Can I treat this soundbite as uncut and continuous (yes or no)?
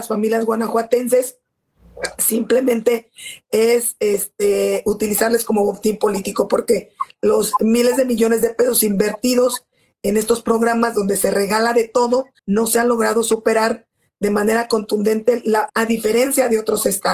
no